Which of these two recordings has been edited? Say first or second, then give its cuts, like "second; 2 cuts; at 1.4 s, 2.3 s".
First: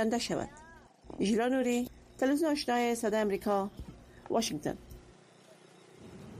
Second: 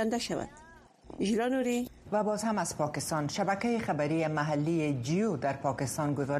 second; 1 cut; at 2.0 s